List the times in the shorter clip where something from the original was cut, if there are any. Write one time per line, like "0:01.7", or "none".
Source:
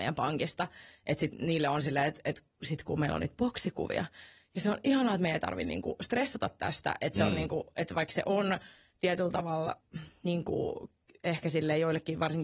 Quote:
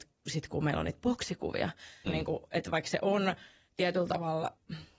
0:02.1